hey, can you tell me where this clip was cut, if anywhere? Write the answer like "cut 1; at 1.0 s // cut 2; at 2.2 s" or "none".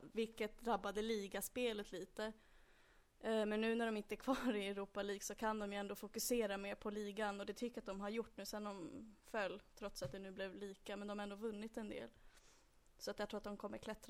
none